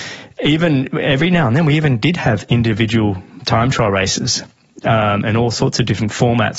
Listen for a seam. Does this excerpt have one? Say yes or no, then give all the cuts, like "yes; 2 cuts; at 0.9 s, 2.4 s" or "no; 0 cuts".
no; 0 cuts